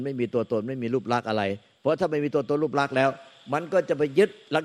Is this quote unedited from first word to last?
yes; 0 cuts

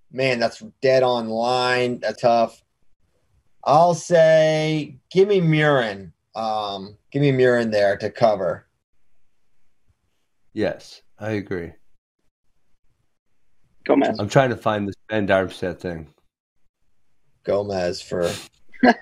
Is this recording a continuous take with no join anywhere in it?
no; 2 cuts; at 2.2 s, 7.1 s

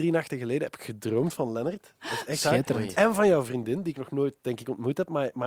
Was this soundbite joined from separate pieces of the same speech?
no; 0 cuts

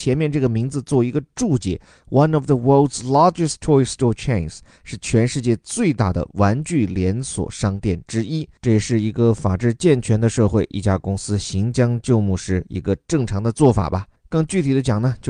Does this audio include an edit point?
yes; 2 cuts; at 8.6 s, 14.2 s

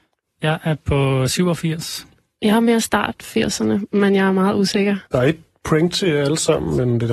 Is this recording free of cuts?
no; 1 cut; at 5.1 s

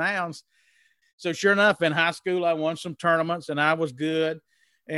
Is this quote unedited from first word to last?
no; 1 cut; at 1.0 s

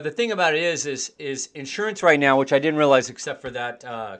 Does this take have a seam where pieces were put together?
no; 0 cuts

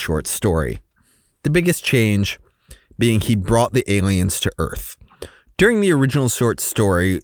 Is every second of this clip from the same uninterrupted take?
yes; 0 cuts

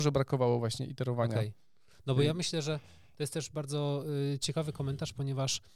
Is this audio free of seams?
yes; 0 cuts

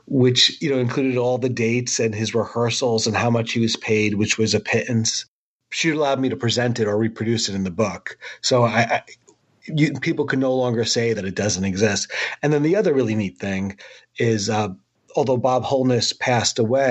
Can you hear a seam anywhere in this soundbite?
no; 0 cuts

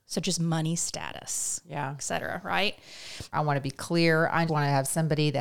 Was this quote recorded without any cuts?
no; 2 cuts; at 3.3 s, 4.5 s

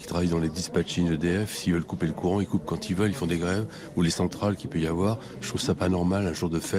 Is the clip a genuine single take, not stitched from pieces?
yes; 0 cuts

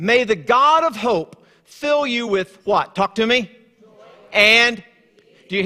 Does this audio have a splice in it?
no; 0 cuts

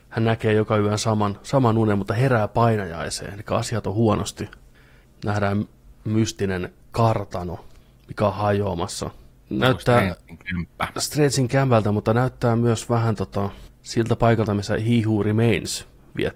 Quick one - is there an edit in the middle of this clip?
yes; 1 cut; at 5.0 s

